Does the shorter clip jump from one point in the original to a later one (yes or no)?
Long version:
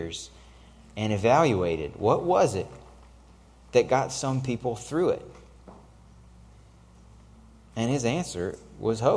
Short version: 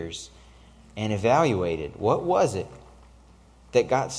no